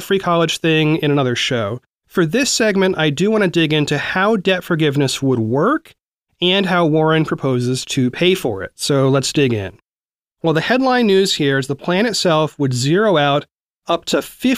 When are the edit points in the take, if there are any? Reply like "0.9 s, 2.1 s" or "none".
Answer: 10.3 s